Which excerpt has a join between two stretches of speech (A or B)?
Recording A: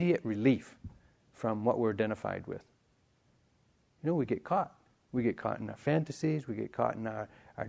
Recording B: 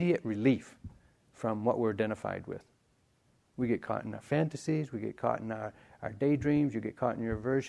B